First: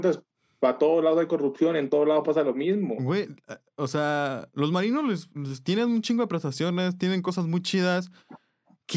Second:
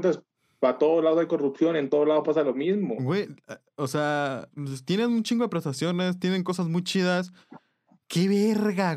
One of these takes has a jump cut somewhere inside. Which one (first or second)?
second